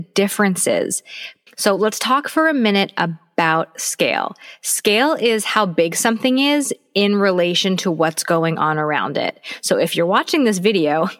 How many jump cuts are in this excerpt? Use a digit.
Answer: 1